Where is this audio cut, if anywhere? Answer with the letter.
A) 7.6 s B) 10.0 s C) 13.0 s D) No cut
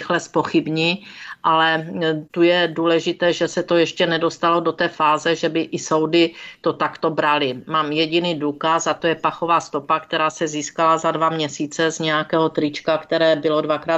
D